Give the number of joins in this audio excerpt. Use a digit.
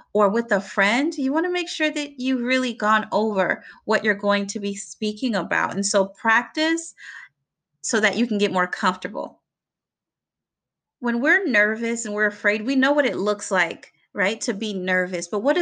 1